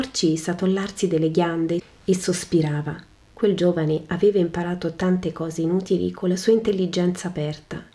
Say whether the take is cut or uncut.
cut